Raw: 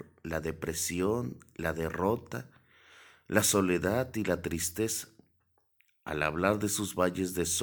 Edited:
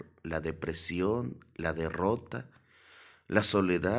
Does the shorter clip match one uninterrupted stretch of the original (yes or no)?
yes